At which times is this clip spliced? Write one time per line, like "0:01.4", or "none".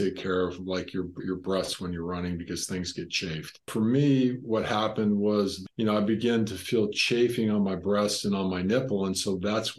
none